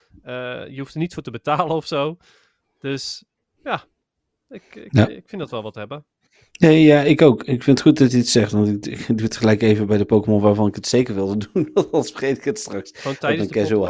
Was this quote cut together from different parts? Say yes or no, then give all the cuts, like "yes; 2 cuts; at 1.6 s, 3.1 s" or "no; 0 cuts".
no; 0 cuts